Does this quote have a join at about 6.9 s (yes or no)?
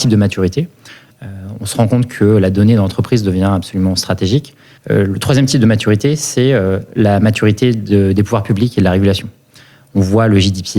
no